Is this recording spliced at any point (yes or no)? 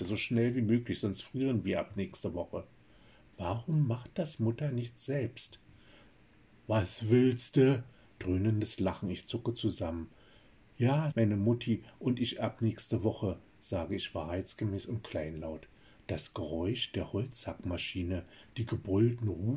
yes